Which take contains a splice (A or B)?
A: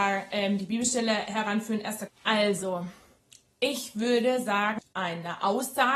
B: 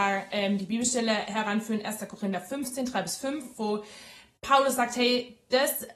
A